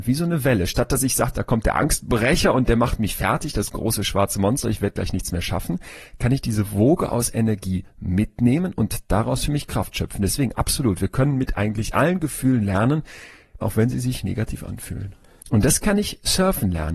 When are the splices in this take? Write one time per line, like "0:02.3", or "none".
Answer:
0:13.6
0:15.4